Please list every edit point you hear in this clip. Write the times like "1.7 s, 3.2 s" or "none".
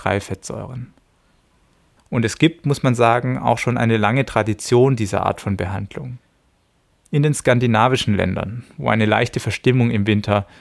2.0 s